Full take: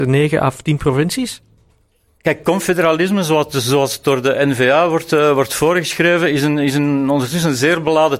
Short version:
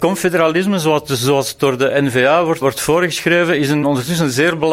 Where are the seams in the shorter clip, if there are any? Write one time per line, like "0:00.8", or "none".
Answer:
0:02.6
0:03.8